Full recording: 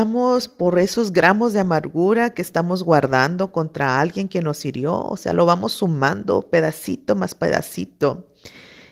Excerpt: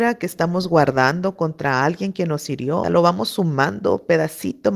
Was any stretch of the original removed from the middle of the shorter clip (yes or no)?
yes